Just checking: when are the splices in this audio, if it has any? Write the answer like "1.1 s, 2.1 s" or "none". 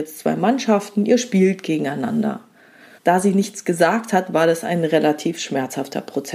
3.0 s